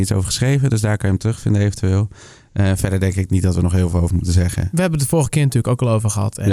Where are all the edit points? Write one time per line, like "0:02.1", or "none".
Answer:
none